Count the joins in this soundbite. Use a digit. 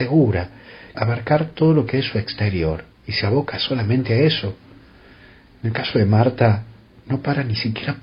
1